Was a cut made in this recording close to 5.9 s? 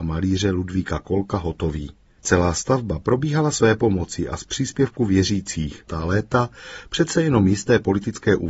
yes; 1 cut; at 5.9 s

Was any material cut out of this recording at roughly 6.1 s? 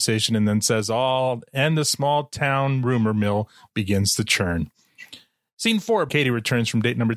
yes; 1 cut; at 6.1 s

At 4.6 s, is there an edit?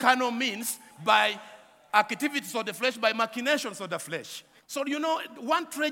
yes; 1 cut; at 4.6 s

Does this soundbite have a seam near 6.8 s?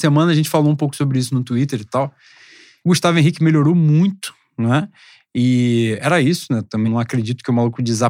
yes; 2 cuts; at 2.8 s, 6.8 s

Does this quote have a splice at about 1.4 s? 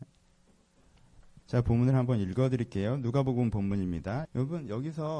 yes; 2 cuts; at 1.4 s, 4.3 s

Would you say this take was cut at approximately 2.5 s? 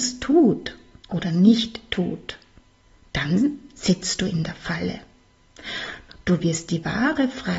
no; 1 cut; at 6.1 s

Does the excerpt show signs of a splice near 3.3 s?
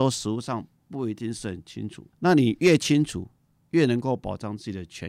no; 1 cut; at 2.1 s

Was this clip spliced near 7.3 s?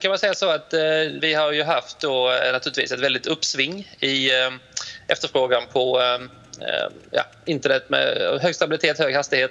no; 1 cut; at 1.2 s

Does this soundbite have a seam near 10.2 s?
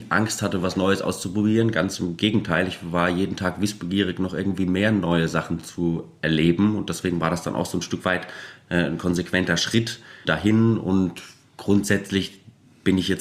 yes; 1 cut; at 10.2 s

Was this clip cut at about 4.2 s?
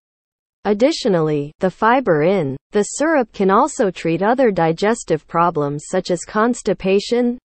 no; 1 cut; at 2.6 s

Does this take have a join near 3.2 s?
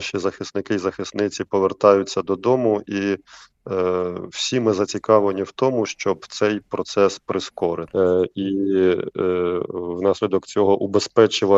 no; 1 cut; at 7.9 s

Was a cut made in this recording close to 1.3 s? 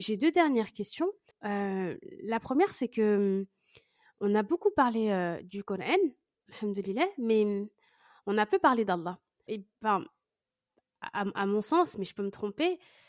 yes; 2 cuts; at 1.3 s, 9.5 s

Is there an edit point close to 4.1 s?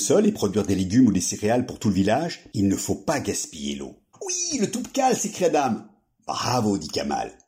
yes; 1 cut; at 4.1 s

